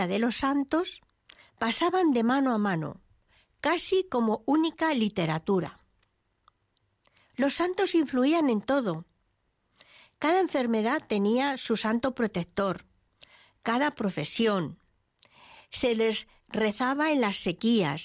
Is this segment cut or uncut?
uncut